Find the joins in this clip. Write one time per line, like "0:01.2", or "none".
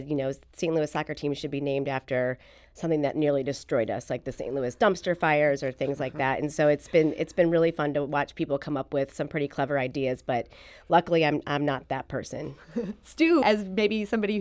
0:13.4